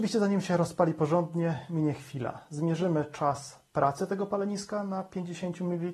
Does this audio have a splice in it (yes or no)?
no